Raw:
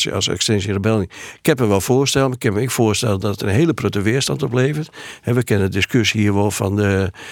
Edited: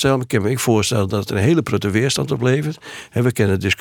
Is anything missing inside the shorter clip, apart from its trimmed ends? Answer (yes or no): no